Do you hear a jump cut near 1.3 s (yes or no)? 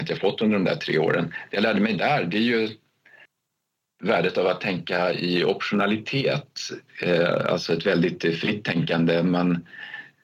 no